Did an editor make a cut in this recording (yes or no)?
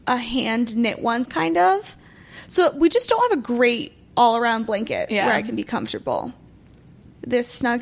yes